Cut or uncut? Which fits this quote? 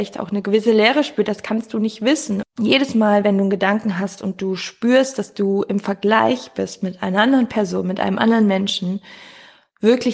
cut